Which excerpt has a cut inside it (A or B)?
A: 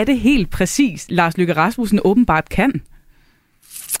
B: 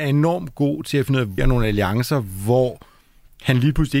B